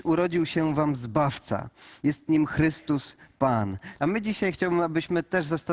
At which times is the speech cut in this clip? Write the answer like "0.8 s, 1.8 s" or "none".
4.0 s